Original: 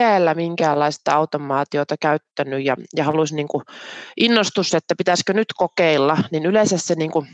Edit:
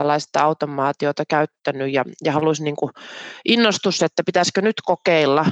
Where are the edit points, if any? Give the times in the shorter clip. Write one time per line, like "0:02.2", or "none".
none